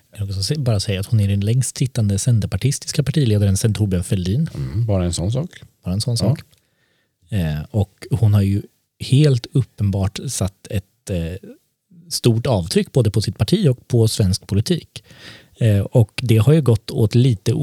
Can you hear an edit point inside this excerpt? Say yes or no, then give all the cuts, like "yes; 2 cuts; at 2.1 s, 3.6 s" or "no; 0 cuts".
no; 0 cuts